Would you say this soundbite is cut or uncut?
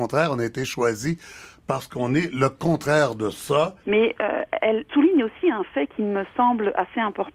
cut